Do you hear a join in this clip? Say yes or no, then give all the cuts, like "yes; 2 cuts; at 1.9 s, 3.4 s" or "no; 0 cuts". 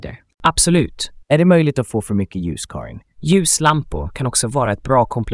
yes; 2 cuts; at 1.2 s, 3.2 s